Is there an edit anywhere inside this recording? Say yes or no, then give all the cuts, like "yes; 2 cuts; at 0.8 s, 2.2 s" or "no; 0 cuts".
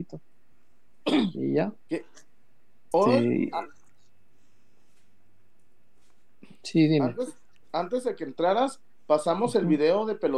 yes; 1 cut; at 2.9 s